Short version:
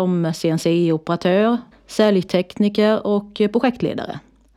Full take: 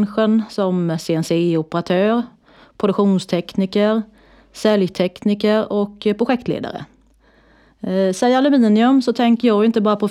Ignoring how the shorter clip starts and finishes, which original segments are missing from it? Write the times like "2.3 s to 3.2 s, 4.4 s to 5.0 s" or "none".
2.4 s to 4.4 s